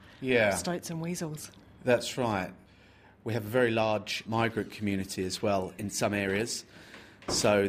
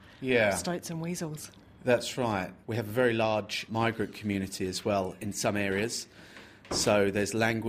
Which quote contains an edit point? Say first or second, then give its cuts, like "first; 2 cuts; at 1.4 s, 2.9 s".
second; 1 cut; at 2.6 s